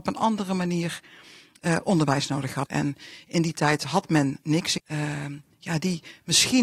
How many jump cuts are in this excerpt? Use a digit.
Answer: 2